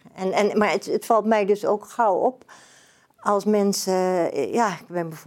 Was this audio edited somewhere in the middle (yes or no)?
no